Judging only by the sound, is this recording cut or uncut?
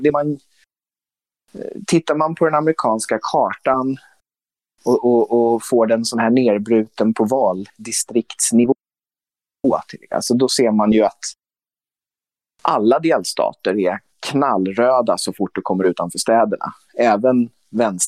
uncut